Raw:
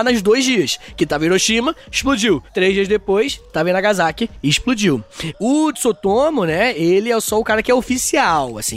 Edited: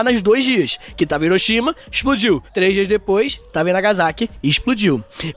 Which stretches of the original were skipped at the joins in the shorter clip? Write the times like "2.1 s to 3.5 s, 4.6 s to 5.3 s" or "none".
none